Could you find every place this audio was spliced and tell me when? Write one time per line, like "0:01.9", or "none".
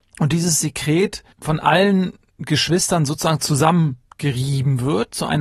0:01.3